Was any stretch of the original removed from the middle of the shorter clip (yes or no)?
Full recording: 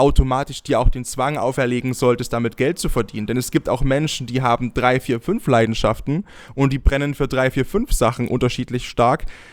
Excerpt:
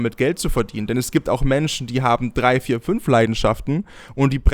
no